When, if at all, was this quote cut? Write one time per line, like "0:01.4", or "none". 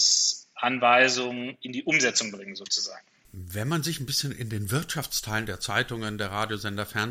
none